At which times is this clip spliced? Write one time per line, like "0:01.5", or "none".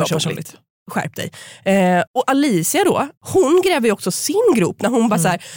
0:02.1
0:03.2